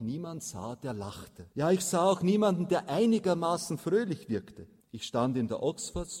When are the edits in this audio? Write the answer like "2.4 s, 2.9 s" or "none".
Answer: 1.5 s, 4.8 s